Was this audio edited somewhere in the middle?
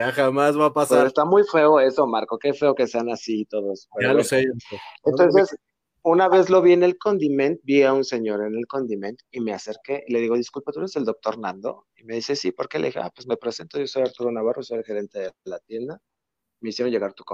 no; 0 cuts

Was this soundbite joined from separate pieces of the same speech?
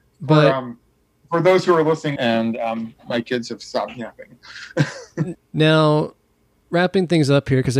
yes; 2 cuts; at 2.2 s, 5.3 s

